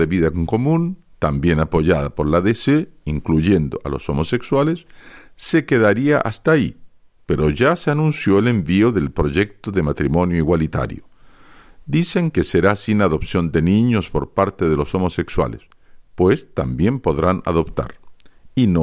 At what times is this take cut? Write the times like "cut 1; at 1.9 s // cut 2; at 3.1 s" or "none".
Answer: cut 1; at 16.0 s